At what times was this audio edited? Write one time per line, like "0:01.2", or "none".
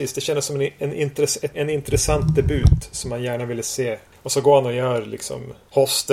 0:01.5